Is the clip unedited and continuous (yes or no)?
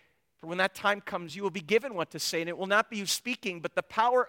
yes